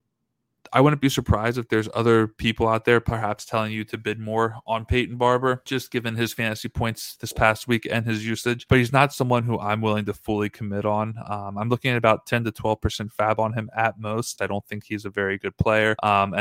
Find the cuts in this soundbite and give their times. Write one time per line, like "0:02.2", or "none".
0:14.4